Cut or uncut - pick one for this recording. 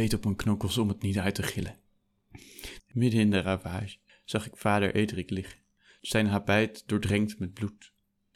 cut